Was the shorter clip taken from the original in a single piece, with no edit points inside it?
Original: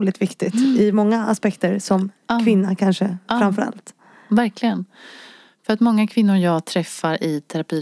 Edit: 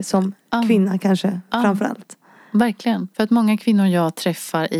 no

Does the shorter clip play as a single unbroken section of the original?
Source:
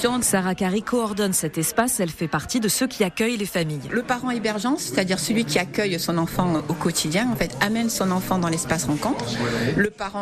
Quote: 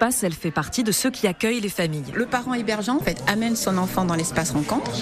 no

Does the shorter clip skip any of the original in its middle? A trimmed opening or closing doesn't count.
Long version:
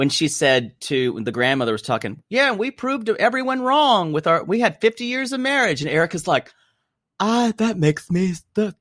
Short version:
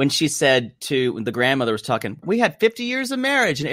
yes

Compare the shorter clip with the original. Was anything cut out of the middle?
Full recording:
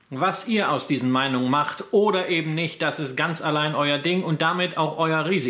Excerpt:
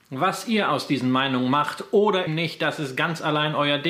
yes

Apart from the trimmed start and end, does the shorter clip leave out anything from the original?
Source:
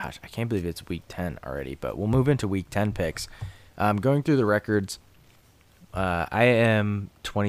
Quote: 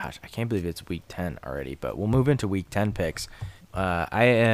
yes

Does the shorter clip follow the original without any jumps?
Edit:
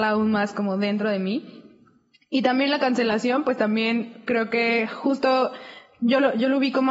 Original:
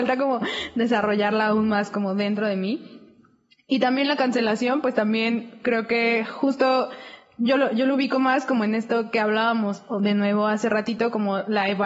yes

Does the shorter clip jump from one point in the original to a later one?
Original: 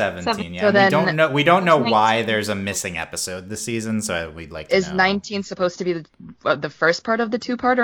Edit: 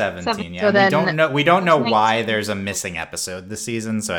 no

